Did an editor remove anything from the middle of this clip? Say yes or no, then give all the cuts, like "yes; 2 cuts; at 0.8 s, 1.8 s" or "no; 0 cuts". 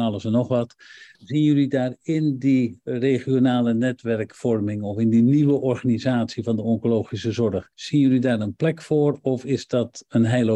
yes; 2 cuts; at 1.1 s, 7.7 s